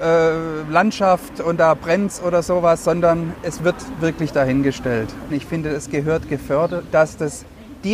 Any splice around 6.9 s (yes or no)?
yes